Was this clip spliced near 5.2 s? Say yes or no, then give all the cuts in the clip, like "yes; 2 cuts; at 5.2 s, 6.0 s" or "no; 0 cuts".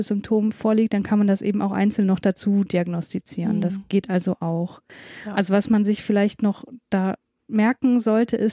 no; 0 cuts